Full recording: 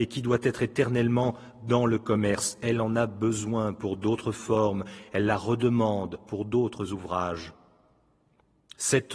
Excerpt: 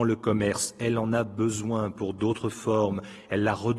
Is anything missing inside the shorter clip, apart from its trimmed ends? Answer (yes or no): no